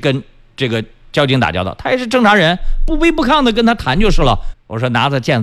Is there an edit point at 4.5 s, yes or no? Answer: yes